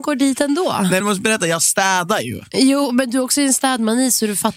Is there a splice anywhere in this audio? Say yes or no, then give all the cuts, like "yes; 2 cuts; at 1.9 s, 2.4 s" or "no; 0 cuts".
yes; 1 cut; at 1.0 s